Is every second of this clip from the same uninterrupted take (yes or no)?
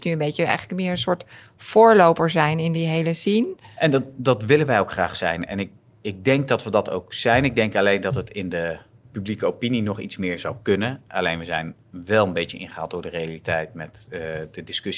yes